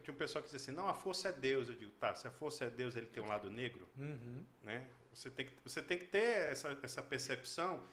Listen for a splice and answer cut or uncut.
uncut